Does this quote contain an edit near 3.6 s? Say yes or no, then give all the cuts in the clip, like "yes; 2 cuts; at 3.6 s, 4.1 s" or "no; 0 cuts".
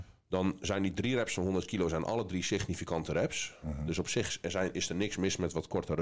yes; 1 cut; at 3.6 s